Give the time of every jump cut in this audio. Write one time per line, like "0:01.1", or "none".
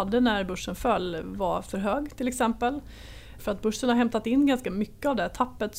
0:03.4